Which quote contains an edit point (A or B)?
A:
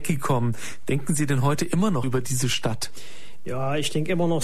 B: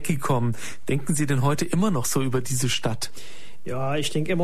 A